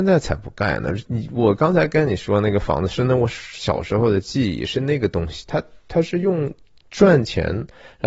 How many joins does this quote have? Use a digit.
1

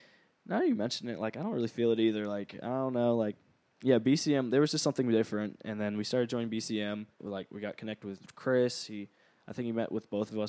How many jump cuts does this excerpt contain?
1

